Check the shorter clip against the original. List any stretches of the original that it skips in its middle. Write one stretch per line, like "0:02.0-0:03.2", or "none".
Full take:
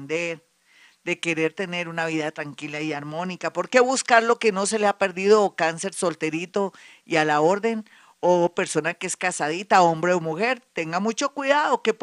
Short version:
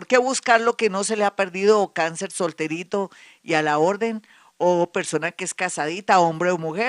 none